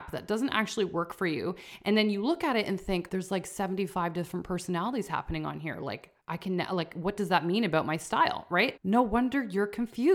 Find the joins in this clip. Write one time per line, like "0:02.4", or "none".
0:03.1
0:06.2
0:08.8

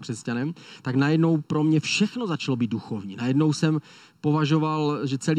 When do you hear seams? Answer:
none

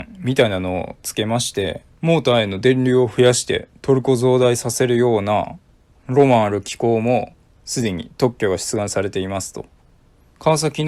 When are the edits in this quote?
0:02.0

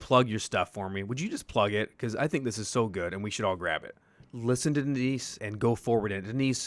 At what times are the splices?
0:04.3
0:05.4

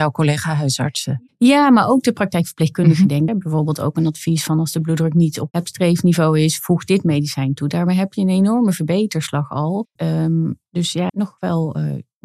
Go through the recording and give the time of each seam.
0:03.3
0:10.0
0:11.1

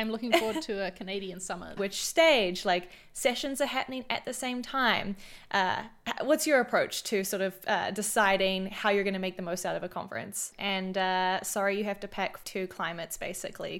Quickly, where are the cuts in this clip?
0:01.8
0:10.5
0:12.4

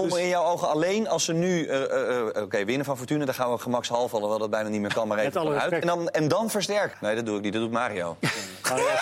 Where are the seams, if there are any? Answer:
0:05.8
0:06.9

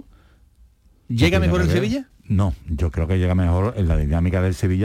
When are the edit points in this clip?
0:02.1

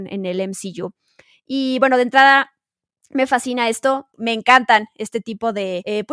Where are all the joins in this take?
none

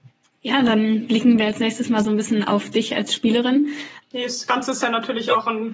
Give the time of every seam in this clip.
0:04.0

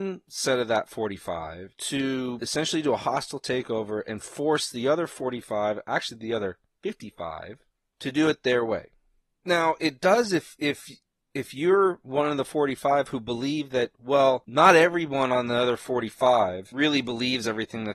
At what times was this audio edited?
none

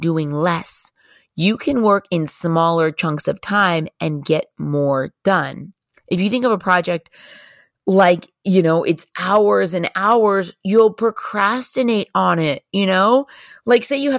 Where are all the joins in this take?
none

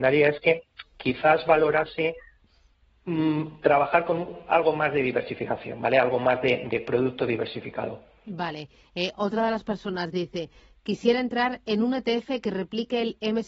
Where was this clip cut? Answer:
none

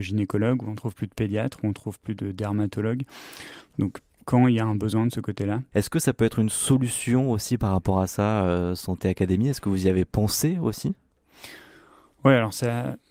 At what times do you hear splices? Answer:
0:05.7

